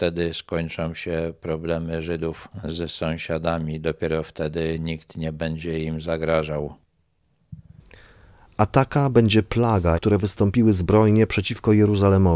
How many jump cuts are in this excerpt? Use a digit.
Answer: 1